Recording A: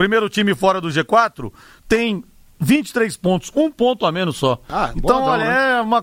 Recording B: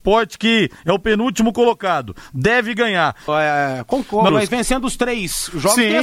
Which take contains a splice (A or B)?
B